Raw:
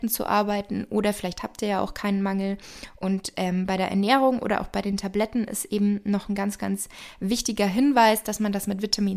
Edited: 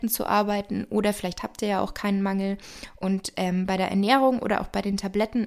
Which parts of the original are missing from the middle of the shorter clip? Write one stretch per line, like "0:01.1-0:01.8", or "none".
none